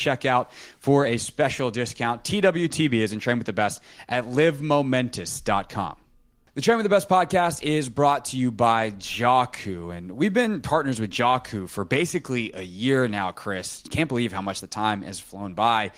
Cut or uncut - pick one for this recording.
uncut